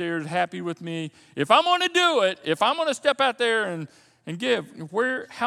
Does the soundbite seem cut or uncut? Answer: uncut